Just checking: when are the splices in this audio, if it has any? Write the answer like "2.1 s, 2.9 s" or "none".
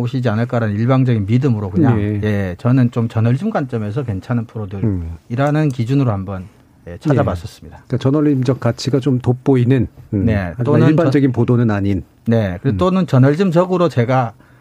none